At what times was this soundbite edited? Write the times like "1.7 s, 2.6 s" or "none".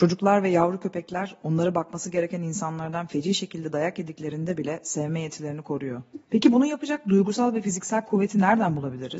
6.3 s

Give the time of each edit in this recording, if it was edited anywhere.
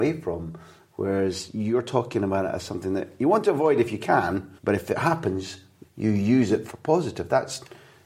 4.6 s, 5.8 s

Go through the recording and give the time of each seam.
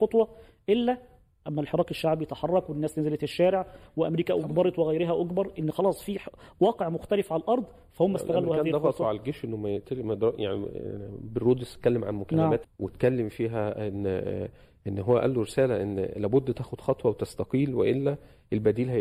12.6 s

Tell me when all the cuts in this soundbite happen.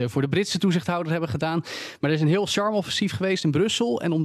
none

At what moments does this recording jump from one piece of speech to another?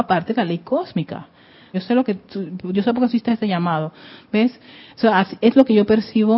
1.7 s

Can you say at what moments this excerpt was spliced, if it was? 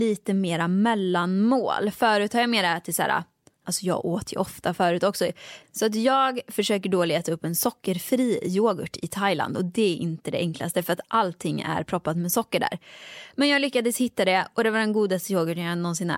3.6 s, 5.6 s

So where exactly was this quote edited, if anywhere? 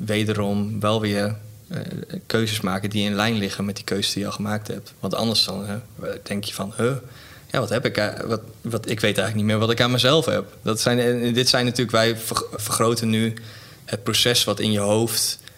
1.6 s, 10.6 s, 12.6 s

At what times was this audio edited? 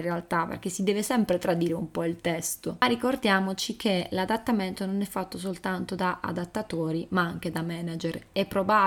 none

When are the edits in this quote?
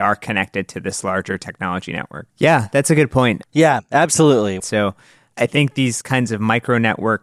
2.3 s, 3.4 s, 4.6 s

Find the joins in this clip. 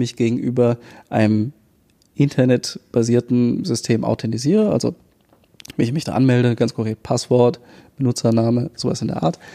none

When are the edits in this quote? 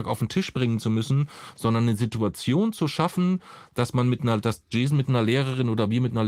none

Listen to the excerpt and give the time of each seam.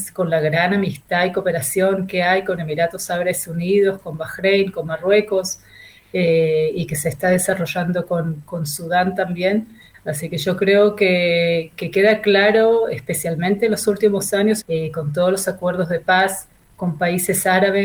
9.9 s, 14.6 s

